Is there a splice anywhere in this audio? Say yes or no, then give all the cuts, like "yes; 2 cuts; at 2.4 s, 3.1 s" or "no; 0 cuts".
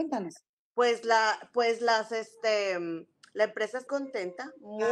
yes; 1 cut; at 3.9 s